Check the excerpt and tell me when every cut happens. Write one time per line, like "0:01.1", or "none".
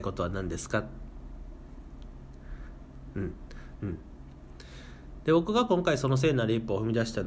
0:03.8